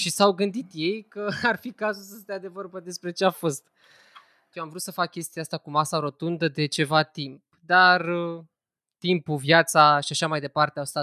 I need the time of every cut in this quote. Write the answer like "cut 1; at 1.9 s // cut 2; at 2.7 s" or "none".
cut 1; at 4.5 s